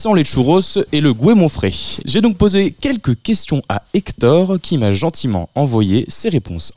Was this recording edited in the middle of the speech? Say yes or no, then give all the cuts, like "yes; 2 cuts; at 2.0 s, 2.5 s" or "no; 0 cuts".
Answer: yes; 1 cut; at 2.0 s